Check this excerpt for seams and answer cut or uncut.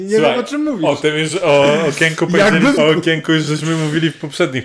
cut